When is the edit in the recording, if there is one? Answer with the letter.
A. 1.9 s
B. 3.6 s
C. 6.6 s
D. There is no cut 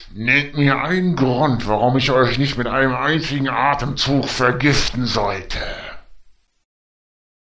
D